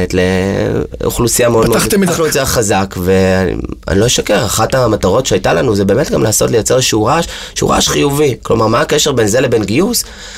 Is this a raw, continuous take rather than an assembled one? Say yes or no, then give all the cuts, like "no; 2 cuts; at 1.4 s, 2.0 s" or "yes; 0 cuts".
no; 1 cut; at 2.1 s